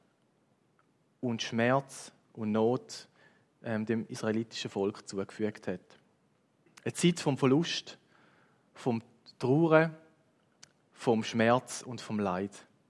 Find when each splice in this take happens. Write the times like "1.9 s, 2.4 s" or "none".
6.7 s